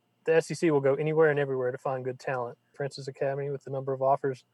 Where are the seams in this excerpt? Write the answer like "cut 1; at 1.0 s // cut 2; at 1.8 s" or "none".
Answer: cut 1; at 2.7 s